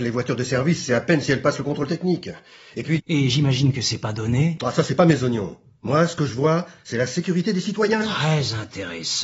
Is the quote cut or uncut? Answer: cut